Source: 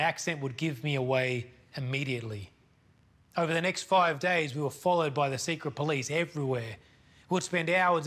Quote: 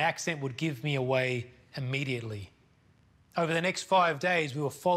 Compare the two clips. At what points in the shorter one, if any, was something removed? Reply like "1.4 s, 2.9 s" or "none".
none